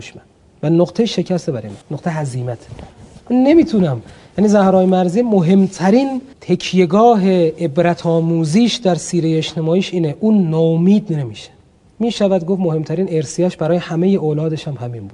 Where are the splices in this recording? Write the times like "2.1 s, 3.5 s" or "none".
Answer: 1.8 s, 6.3 s